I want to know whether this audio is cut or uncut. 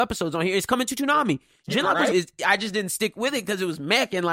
cut